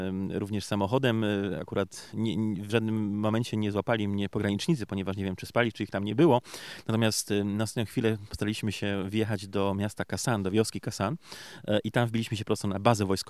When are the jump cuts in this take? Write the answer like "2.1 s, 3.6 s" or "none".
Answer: 2.1 s